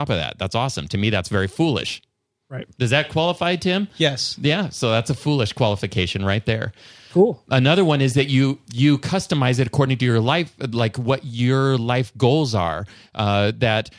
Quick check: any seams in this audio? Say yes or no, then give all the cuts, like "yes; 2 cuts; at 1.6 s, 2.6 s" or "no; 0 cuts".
no; 0 cuts